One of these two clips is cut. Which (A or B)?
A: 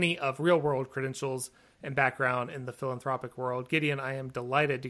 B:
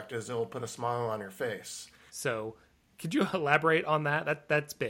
B